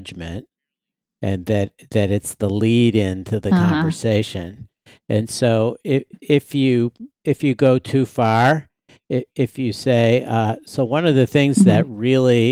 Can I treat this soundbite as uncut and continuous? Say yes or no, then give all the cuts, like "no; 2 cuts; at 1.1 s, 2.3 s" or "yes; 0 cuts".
yes; 0 cuts